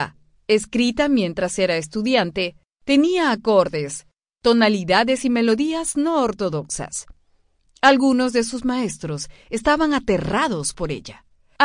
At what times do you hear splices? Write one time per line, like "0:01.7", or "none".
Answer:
none